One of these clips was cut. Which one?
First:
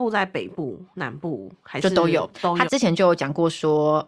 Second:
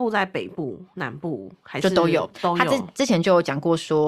first; 1 cut; at 2.7 s

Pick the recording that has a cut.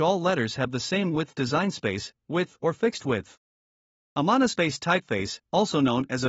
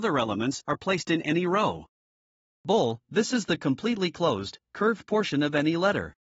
second; 1 cut; at 2.5 s

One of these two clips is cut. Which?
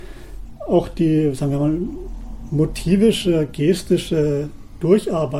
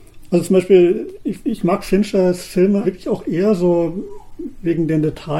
second; 1 cut; at 2.8 s

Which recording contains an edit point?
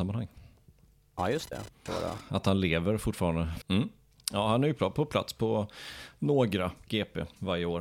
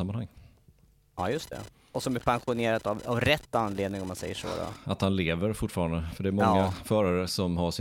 first; 2 cuts; at 1.9 s, 3.6 s

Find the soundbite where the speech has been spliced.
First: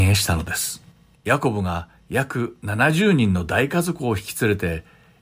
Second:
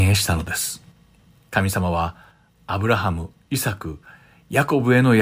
first; 1 cut; at 1.2 s

